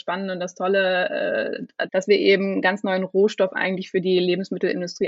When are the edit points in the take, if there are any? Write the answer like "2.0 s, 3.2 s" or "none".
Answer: 1.9 s